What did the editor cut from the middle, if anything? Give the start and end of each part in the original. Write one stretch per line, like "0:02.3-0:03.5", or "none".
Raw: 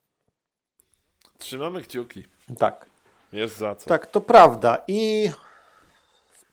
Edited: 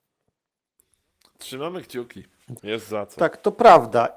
0:02.6-0:03.3